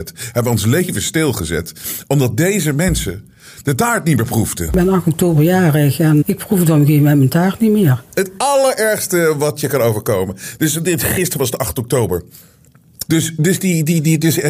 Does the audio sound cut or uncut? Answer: cut